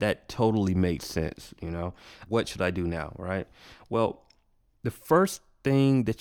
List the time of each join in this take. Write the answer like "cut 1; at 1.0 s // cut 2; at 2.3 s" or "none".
cut 1; at 2.3 s